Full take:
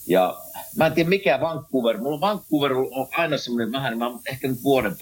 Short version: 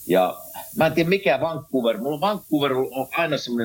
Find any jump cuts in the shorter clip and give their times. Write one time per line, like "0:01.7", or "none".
none

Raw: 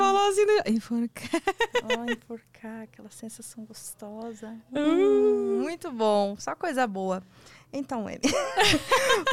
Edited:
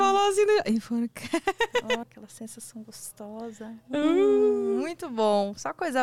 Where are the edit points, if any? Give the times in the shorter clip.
0:02.0

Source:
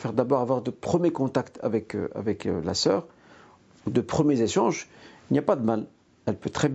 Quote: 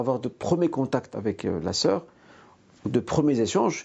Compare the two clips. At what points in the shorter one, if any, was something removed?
0:01.1

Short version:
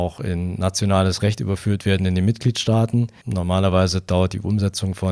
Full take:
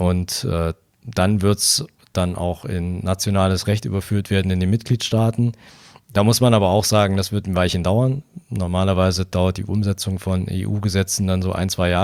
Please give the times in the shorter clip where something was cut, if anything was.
0:03.2

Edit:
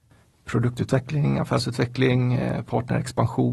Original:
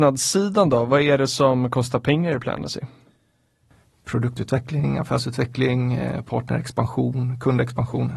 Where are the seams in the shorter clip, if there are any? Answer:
none

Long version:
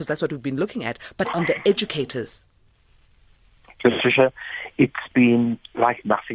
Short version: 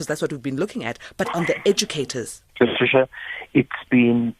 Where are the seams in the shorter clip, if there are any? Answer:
0:02.5

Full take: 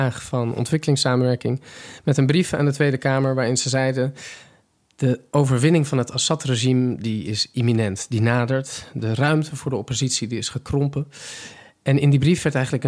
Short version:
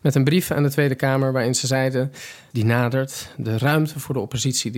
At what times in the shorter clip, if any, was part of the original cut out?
0:02.5

